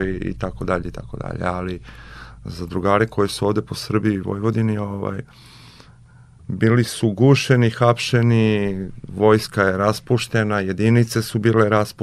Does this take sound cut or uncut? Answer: uncut